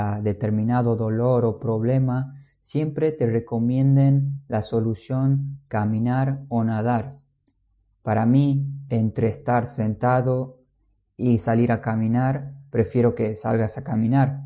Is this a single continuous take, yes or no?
yes